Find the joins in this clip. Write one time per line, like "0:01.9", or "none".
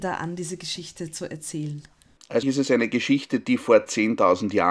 0:02.4